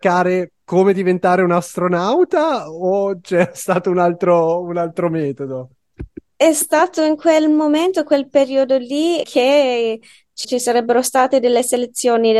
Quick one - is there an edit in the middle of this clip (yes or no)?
yes